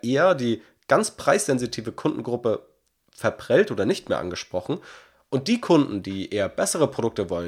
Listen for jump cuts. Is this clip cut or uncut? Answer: uncut